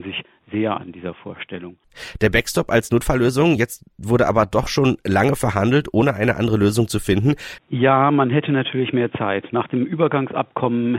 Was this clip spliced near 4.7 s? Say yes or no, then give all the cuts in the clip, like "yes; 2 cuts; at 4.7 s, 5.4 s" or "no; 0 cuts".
no; 1 cut; at 7.6 s